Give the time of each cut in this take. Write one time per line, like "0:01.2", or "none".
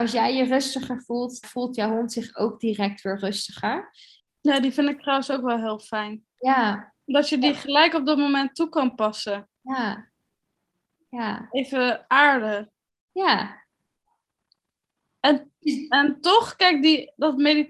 0:01.4
0:04.2

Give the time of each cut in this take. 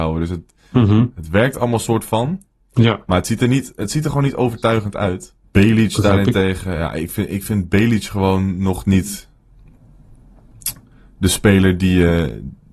0:05.4

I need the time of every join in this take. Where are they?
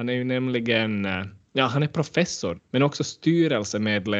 0:02.6

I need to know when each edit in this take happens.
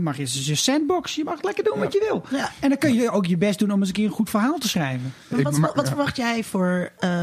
none

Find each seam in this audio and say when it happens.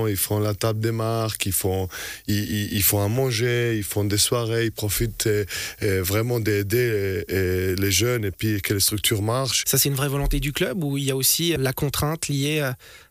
0:09.6
0:11.6

